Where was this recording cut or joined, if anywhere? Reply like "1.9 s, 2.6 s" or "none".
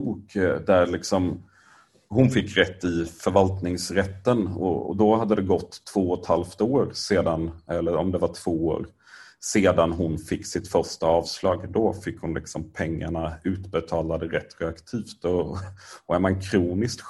4.8 s